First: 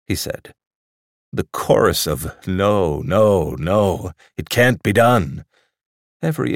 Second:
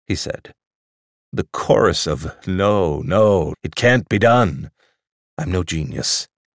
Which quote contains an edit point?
second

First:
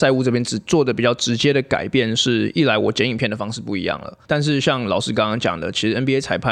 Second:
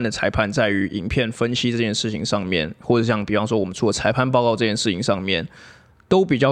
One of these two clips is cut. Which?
first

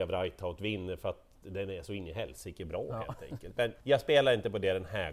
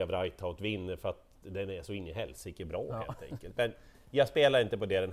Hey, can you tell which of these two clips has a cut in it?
first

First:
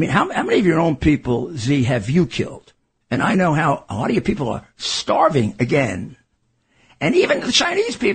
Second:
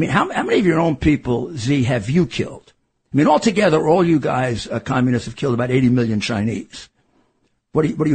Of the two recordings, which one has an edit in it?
first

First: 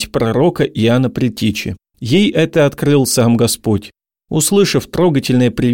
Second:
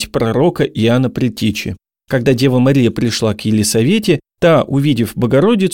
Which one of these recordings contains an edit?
first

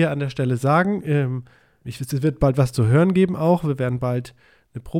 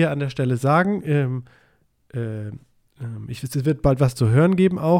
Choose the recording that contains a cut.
first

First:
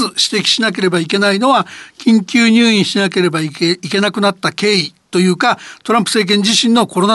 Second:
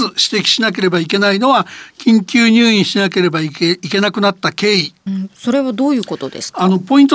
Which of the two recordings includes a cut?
second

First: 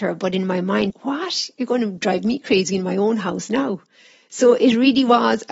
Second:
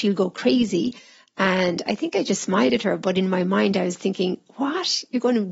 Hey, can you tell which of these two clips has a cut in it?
first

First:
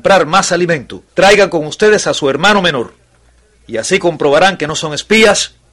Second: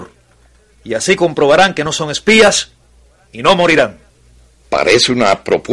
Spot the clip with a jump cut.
first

